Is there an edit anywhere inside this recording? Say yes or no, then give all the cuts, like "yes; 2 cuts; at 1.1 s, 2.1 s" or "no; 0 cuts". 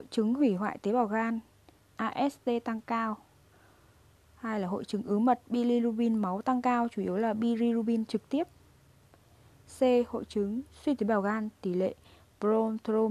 yes; 1 cut; at 1.8 s